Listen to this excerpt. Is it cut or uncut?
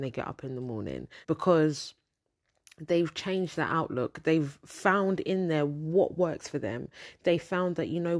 cut